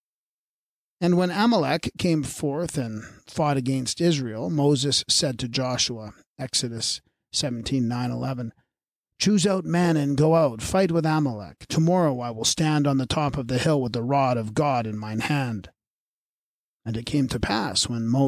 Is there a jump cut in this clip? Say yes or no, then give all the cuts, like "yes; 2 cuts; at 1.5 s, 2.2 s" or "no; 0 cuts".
no; 0 cuts